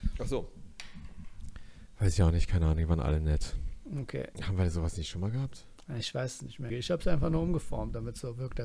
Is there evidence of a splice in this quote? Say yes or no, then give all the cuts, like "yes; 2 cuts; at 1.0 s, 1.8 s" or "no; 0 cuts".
yes; 2 cuts; at 4.3 s, 6.7 s